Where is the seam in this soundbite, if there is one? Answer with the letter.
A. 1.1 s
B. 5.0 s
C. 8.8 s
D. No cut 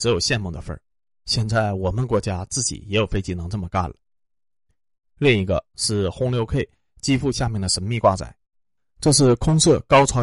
D